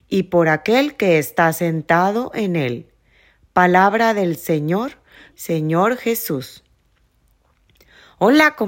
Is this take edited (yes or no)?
yes